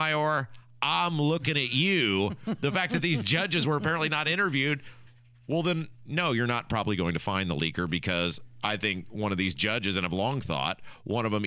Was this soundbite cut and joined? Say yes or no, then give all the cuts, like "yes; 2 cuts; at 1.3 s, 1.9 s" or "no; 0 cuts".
no; 0 cuts